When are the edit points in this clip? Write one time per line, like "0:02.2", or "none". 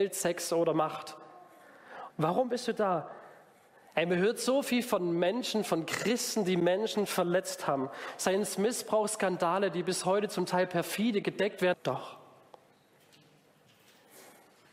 0:02.1
0:11.7